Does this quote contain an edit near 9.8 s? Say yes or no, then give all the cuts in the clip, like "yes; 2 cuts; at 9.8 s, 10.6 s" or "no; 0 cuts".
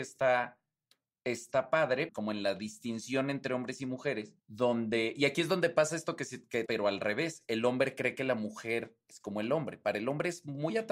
no; 3 cuts; at 2.1 s, 4.4 s, 6.7 s